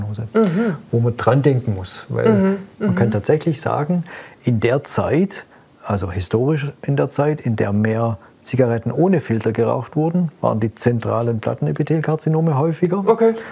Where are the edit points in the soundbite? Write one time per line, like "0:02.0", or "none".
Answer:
0:02.8

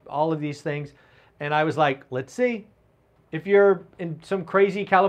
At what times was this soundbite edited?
0:03.2

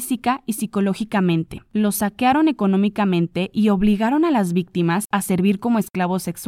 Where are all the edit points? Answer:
none

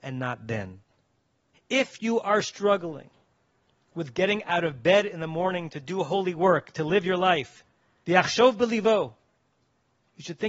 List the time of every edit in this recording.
0:01.5
0:08.0

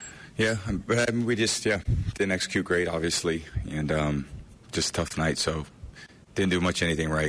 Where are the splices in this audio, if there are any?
none

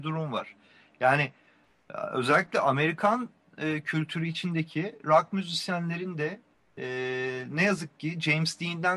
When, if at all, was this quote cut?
none

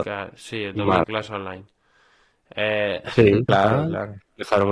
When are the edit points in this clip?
0:01.0
0:03.5

